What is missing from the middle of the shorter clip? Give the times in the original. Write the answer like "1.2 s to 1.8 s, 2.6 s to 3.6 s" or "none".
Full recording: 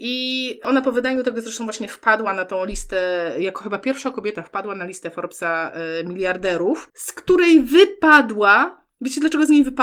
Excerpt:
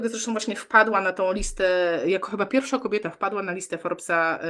none